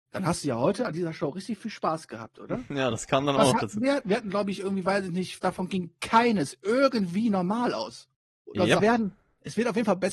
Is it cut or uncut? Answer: cut